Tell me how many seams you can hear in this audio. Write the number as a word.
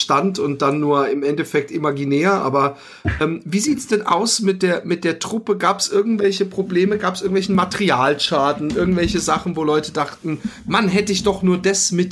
zero